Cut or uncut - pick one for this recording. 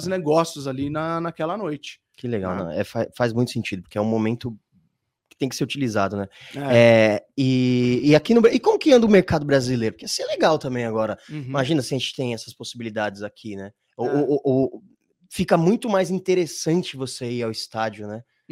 uncut